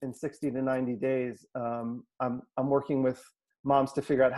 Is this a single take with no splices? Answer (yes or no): yes